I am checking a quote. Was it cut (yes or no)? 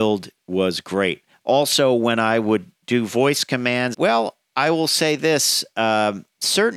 yes